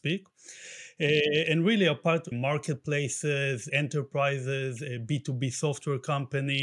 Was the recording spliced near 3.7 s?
yes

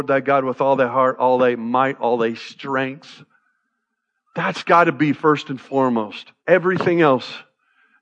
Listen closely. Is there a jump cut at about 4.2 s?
no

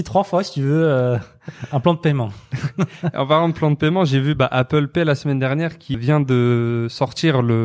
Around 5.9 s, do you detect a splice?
yes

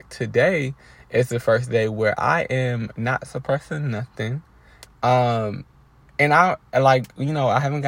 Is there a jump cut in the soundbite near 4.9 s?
yes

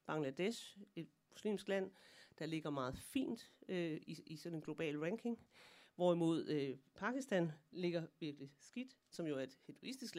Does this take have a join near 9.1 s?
yes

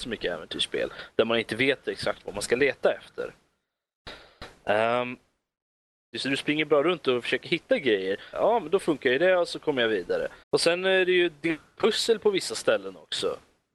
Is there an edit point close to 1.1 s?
no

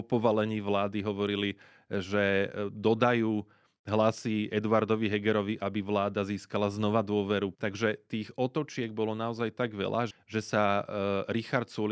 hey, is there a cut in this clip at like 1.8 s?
no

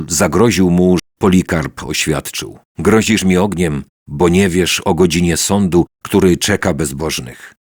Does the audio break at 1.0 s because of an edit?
yes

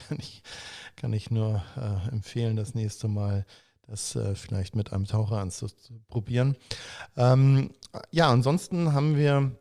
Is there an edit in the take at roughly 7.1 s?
no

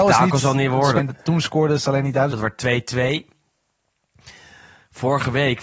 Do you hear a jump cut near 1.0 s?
yes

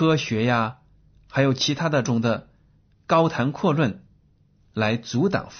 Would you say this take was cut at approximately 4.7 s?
no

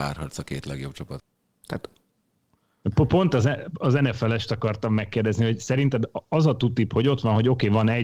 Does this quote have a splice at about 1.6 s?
no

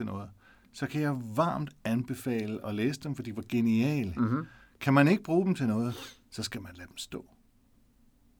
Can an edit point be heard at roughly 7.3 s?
no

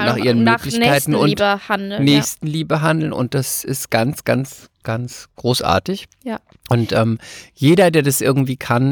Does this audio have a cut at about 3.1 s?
no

